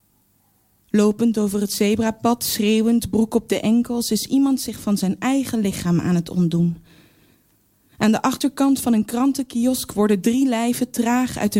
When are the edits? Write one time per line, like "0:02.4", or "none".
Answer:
none